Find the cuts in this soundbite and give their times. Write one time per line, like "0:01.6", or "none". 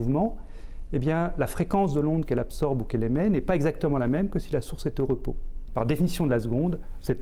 0:05.7